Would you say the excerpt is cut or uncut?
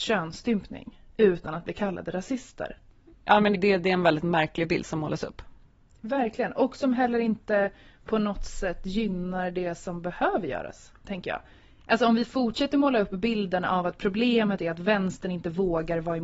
cut